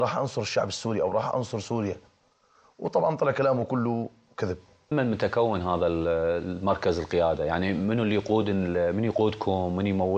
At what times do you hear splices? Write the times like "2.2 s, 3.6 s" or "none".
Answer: 4.9 s